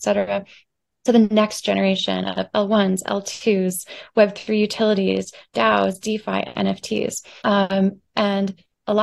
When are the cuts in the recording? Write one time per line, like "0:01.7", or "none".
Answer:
0:07.4